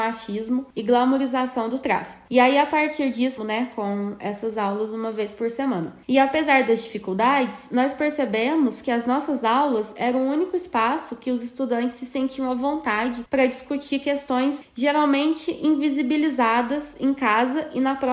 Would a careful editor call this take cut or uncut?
cut